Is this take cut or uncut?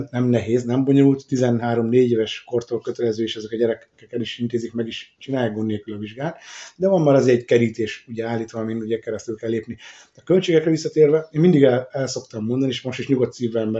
uncut